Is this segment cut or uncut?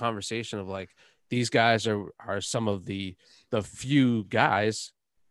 uncut